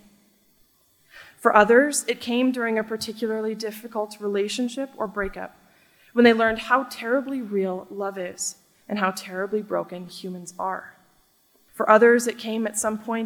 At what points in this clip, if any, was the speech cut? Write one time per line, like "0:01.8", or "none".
0:11.7